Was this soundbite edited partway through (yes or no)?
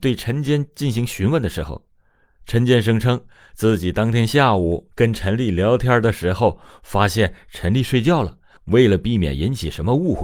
no